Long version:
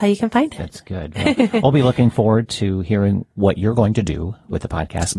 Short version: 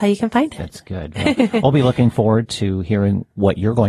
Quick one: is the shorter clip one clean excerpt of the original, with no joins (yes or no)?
yes